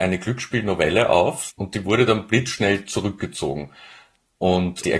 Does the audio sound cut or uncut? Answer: cut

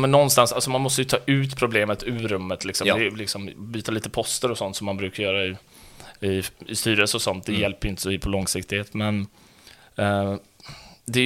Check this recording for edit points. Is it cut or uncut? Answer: uncut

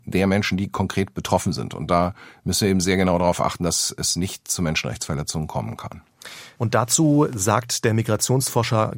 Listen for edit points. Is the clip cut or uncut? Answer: cut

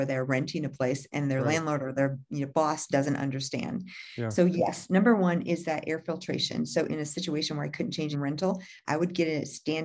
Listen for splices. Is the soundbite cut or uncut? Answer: cut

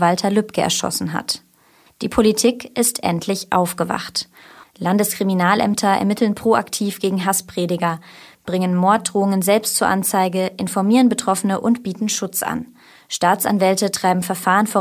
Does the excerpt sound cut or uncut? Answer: cut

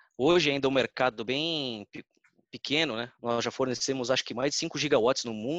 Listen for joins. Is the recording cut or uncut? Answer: cut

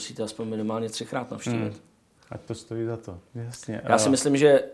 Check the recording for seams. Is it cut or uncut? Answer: uncut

